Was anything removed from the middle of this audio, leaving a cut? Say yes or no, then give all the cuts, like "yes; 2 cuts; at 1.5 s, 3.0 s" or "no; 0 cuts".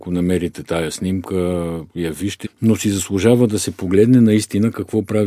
yes; 1 cut; at 2.4 s